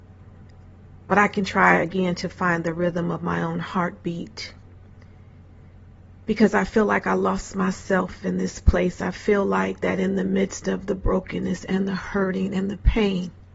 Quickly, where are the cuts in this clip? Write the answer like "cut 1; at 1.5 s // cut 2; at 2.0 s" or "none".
none